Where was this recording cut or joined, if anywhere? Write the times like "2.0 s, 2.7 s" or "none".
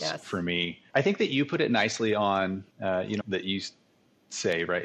0.9 s, 3.2 s